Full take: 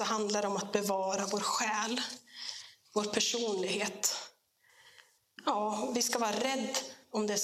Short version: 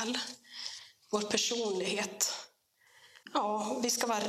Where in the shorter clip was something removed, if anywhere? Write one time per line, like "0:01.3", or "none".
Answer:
0:03.2